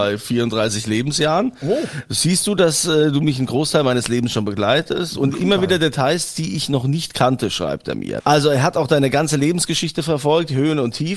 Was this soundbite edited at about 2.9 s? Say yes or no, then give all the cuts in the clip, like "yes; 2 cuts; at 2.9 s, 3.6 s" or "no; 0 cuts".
no; 2 cuts; at 5.4 s, 8.2 s